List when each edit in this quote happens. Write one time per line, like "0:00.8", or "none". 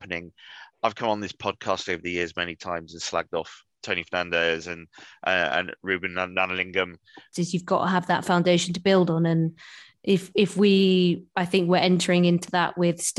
0:03.8
0:07.3